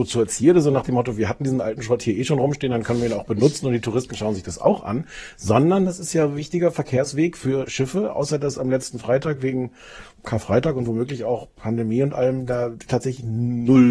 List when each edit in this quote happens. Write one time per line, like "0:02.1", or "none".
none